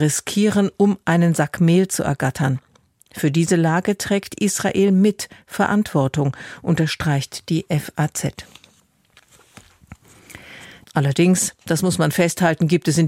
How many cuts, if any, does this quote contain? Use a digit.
1